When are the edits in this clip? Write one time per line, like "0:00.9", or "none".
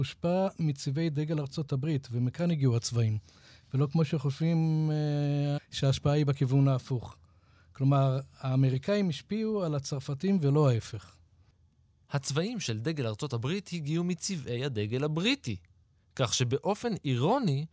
0:05.6